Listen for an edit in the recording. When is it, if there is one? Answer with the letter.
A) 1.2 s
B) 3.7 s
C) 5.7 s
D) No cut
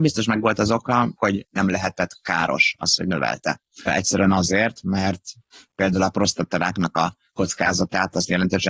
A